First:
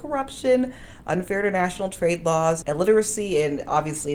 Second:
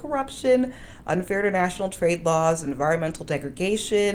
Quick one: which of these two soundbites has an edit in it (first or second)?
first